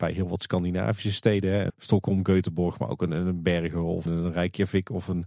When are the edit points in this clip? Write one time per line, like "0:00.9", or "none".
0:01.7
0:04.1